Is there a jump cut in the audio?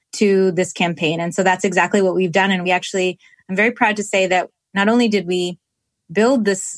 no; 0 cuts

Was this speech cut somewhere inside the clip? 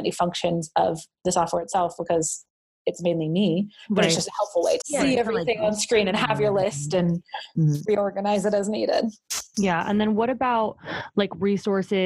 yes; 1 cut; at 4.8 s

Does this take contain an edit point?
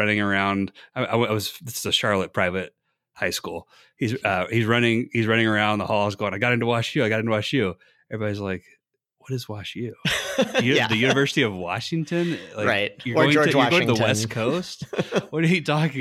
no; 0 cuts

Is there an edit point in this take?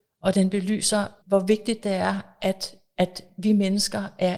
yes; 1 cut; at 1.2 s

